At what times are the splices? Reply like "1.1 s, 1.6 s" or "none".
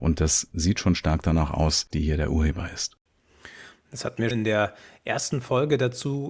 1.9 s, 4.3 s